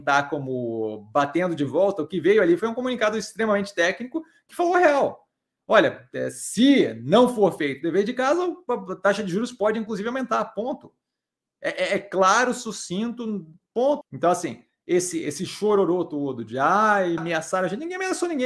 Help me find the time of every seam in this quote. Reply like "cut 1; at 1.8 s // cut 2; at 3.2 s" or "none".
cut 1; at 14.0 s // cut 2; at 17.2 s